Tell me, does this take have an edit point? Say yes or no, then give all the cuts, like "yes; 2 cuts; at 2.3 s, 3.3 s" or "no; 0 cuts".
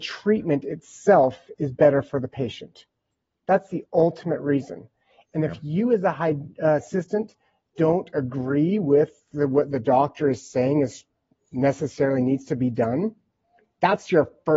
no; 0 cuts